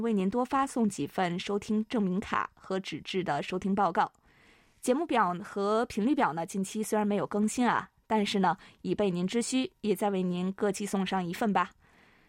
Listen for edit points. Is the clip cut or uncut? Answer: uncut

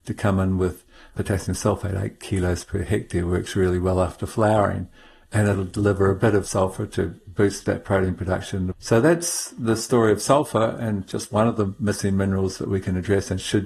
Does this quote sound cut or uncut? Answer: cut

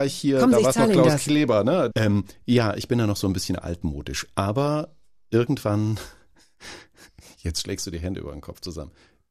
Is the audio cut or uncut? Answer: cut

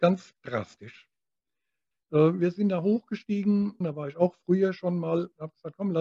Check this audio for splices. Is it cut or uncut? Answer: cut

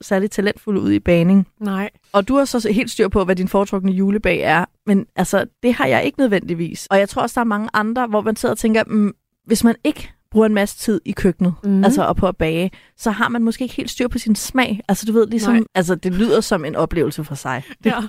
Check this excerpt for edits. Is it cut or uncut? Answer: cut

